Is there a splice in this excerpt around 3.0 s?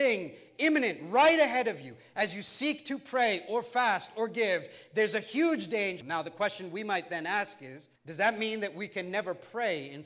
no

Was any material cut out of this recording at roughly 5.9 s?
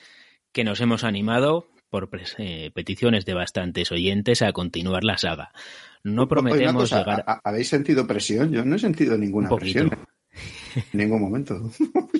no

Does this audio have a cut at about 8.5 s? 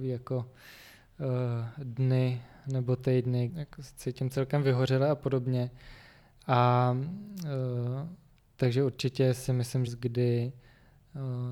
no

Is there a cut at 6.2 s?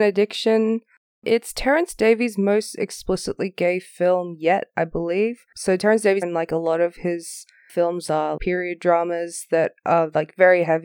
yes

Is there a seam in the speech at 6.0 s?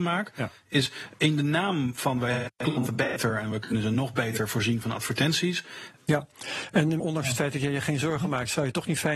yes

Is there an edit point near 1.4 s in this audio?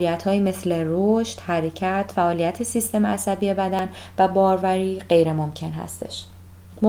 no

